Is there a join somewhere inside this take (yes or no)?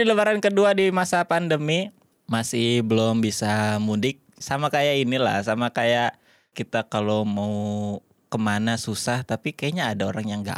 yes